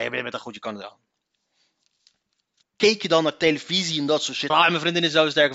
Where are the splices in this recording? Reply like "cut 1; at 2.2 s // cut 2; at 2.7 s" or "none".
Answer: cut 1; at 2.6 s // cut 2; at 4.5 s